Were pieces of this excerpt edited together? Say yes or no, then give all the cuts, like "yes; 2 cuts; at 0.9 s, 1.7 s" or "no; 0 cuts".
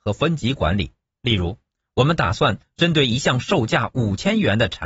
yes; 1 cut; at 1.2 s